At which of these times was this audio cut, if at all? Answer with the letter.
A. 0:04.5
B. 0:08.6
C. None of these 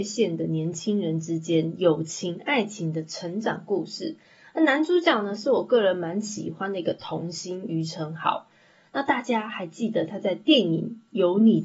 C